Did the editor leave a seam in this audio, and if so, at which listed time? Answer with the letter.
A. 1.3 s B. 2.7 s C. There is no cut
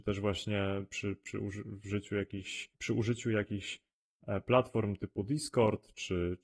B